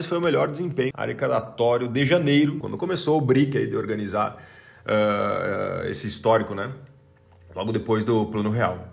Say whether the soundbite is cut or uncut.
cut